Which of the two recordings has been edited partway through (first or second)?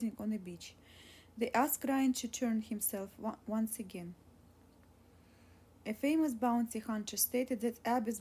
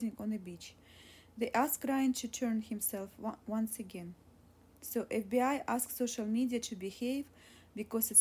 second